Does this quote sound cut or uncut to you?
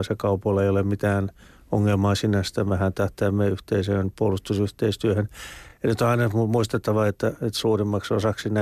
uncut